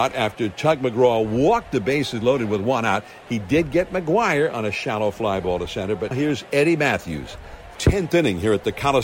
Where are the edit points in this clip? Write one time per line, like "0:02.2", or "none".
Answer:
0:06.1
0:07.7